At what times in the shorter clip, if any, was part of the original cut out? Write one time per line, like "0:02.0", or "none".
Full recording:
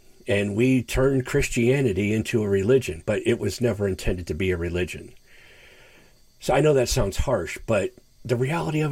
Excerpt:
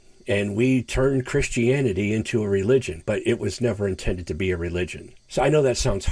0:05.2